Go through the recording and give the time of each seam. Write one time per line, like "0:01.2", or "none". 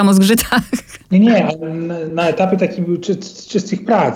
none